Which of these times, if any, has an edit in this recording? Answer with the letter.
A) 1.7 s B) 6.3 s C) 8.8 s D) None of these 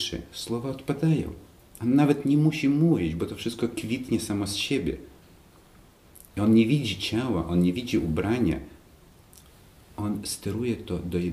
D